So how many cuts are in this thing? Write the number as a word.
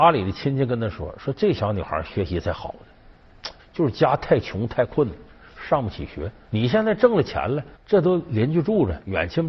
three